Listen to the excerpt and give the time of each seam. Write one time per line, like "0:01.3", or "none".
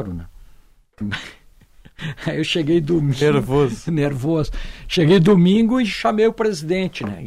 none